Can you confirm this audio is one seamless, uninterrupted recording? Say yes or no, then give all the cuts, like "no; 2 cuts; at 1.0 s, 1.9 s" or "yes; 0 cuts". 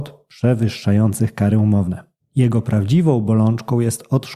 no; 1 cut; at 2.2 s